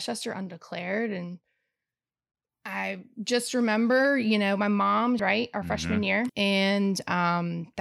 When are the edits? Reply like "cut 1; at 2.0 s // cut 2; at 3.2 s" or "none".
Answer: cut 1; at 5.2 s // cut 2; at 6.3 s